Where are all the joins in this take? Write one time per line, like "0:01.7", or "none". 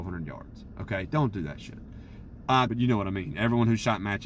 0:02.7